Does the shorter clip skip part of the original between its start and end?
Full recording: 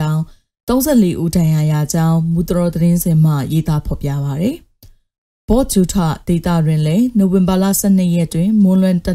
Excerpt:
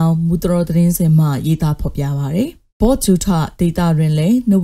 yes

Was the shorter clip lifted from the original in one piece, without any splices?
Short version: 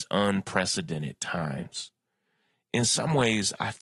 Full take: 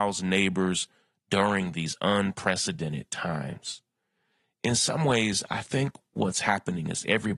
yes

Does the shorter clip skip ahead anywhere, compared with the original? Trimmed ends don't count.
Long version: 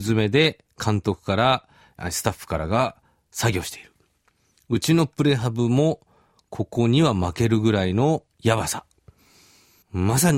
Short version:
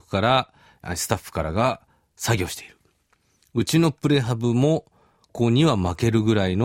yes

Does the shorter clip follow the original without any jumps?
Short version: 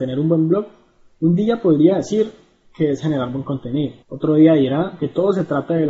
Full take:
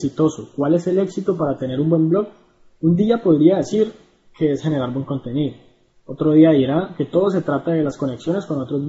no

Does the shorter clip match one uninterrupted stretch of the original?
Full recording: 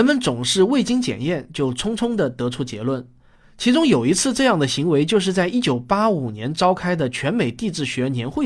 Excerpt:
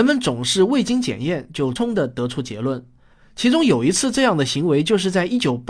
no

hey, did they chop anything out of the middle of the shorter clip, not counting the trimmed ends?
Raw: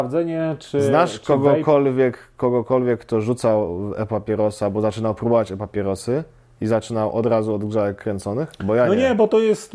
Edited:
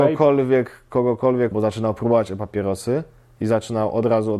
yes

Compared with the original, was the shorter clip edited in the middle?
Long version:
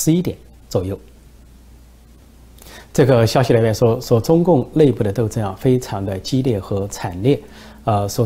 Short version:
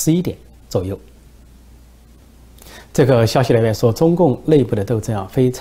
yes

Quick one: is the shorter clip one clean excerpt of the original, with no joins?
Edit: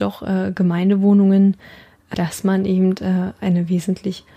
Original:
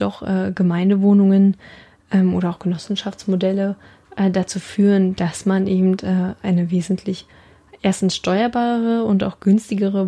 no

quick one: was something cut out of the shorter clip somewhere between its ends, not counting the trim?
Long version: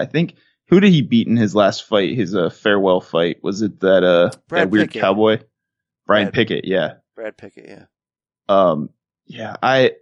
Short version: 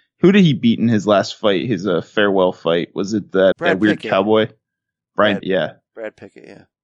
yes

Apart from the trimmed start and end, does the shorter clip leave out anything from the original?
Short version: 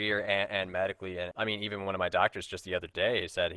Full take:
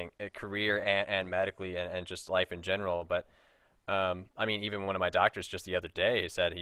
yes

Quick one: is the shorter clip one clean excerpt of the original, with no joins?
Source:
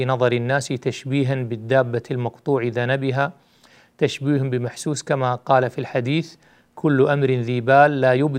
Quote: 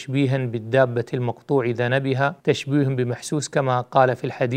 no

